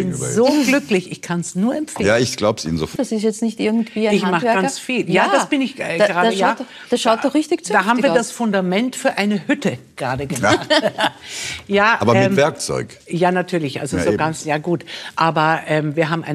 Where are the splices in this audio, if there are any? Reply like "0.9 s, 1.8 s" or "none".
3.0 s